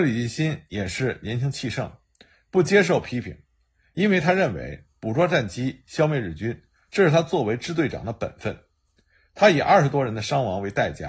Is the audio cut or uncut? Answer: uncut